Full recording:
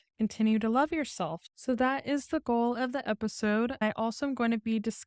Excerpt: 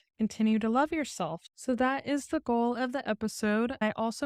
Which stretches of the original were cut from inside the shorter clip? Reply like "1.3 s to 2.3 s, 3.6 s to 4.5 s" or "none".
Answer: none